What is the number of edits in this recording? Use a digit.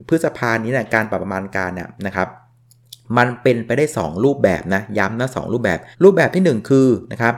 1